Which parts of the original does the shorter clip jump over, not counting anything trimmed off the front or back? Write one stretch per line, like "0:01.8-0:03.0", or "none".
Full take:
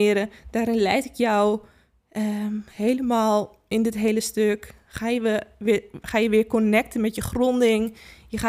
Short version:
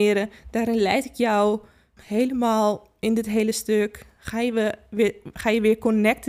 0:02.0-0:02.7